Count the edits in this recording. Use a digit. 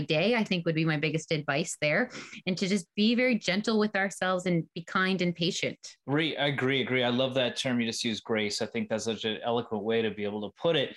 1